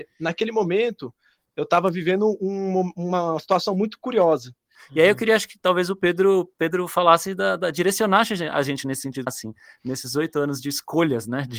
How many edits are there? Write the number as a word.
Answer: two